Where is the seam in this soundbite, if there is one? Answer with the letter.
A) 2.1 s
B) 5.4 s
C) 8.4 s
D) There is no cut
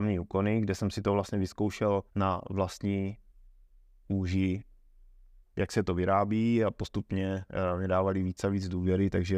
A